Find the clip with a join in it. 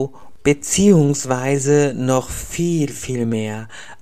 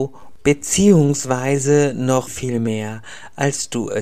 second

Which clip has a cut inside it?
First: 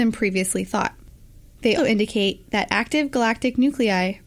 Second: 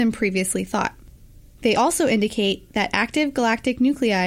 first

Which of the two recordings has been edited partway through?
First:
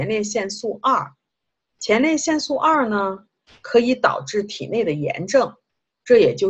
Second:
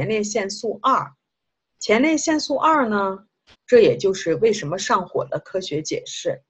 second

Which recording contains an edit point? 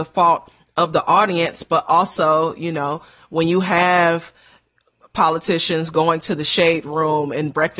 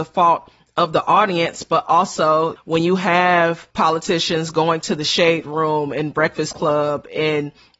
second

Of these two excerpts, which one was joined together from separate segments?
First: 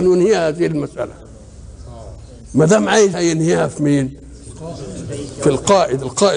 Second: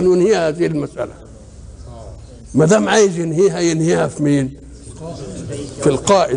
first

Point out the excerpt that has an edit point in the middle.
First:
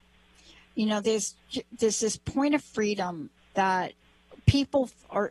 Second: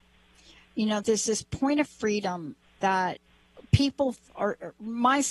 second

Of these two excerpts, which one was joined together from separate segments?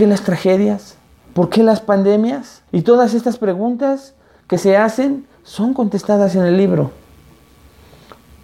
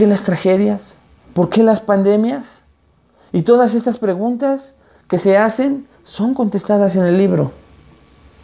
first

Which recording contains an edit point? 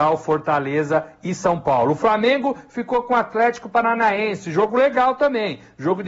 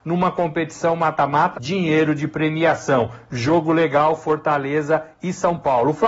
second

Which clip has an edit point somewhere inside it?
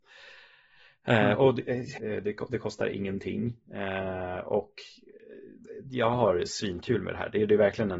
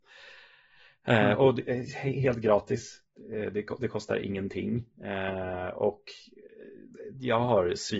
first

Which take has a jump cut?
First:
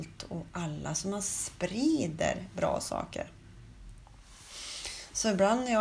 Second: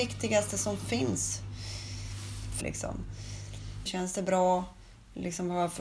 second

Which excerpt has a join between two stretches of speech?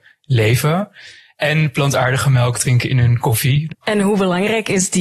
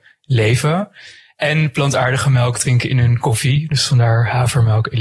first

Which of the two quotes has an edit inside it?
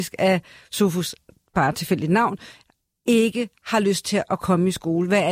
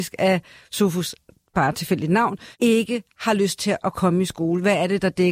second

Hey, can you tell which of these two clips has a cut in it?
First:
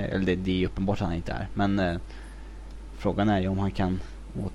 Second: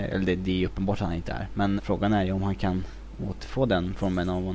second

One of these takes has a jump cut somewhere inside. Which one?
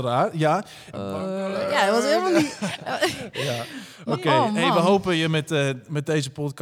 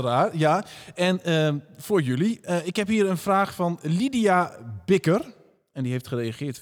first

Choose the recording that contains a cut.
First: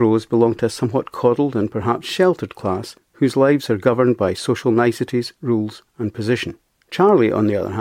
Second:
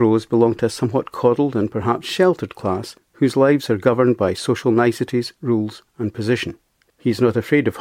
second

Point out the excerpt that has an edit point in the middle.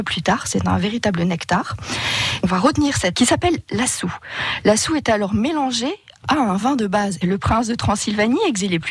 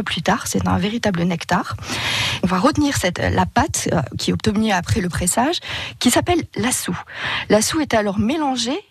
first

